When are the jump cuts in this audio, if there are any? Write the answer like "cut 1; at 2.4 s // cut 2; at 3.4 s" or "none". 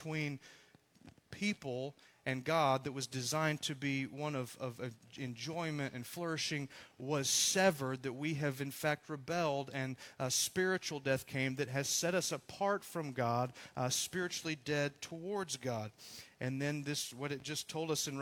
none